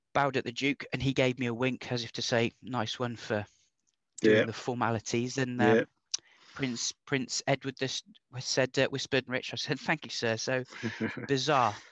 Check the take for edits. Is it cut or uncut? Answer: cut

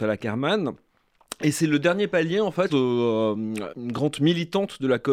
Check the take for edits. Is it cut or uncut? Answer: cut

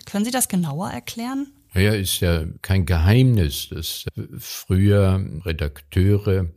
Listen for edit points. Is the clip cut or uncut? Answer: uncut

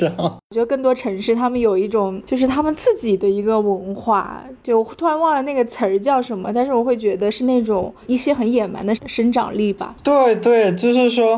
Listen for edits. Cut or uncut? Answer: uncut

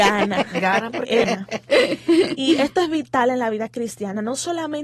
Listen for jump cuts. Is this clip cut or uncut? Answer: cut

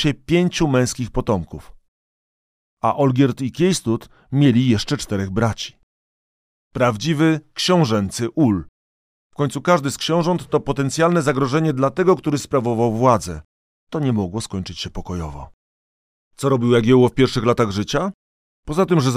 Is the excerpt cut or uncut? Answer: uncut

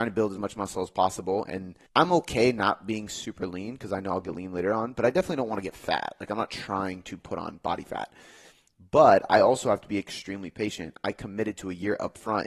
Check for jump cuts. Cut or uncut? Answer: cut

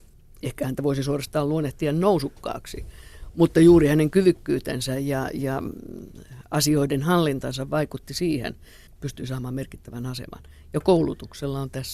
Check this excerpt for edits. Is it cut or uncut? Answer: cut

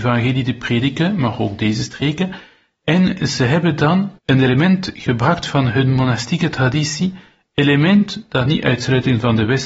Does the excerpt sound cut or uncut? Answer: cut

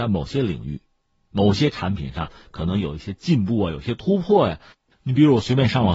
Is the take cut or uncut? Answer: uncut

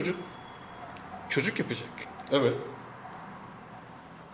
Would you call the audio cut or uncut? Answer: uncut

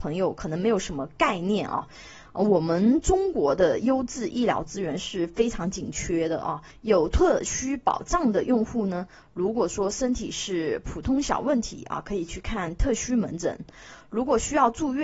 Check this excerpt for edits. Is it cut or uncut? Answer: uncut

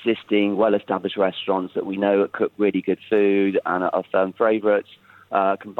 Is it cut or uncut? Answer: uncut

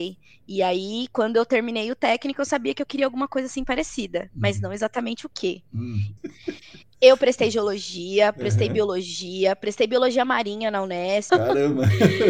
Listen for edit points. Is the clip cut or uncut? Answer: cut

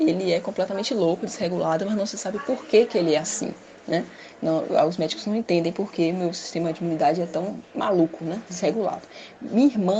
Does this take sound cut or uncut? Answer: uncut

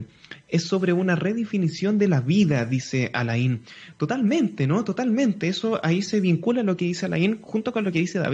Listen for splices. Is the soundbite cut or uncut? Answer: uncut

